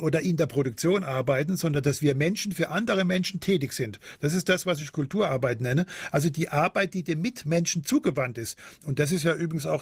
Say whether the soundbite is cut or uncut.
uncut